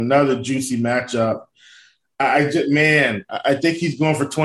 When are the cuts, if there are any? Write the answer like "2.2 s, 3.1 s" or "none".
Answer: none